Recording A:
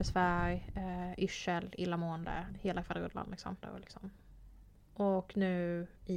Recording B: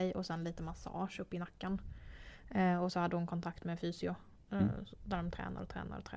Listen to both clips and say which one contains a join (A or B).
A